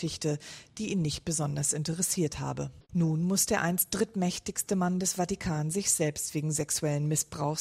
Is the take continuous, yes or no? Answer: no